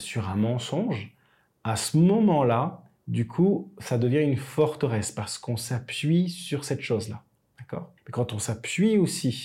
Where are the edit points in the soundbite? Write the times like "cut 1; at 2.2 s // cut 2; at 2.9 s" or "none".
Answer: cut 1; at 8.0 s